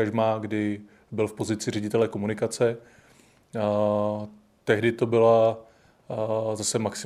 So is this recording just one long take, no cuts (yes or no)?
yes